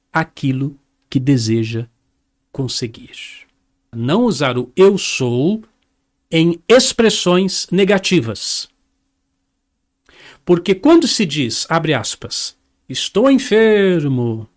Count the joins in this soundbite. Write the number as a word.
one